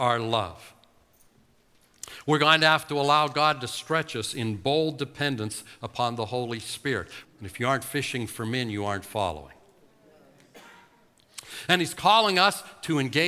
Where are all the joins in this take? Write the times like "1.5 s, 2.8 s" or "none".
7.2 s